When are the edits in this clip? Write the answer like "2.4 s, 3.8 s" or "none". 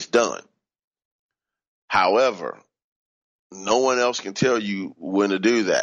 none